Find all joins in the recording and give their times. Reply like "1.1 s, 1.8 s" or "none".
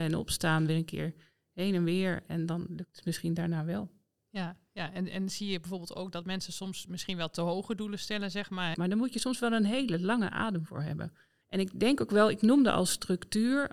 8.7 s, 11.4 s